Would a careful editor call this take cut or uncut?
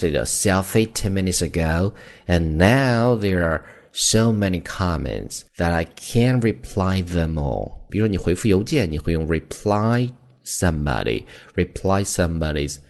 cut